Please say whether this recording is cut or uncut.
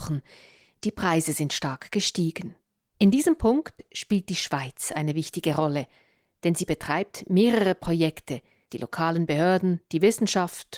cut